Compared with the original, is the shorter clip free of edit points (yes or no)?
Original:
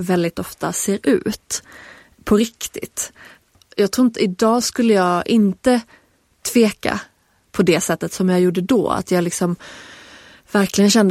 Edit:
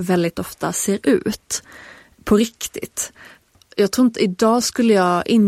yes